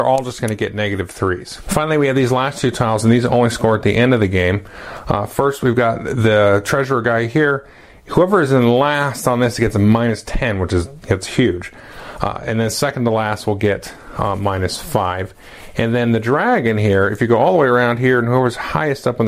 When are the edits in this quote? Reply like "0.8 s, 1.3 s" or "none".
none